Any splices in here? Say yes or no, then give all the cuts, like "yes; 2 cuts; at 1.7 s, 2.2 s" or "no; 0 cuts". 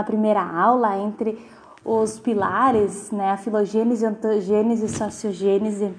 no; 0 cuts